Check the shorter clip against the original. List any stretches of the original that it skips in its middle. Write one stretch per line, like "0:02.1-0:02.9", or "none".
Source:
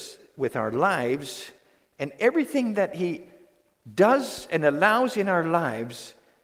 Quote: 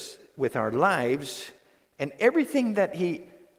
none